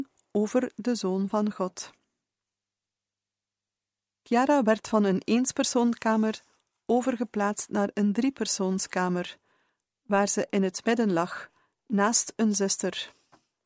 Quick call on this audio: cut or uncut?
uncut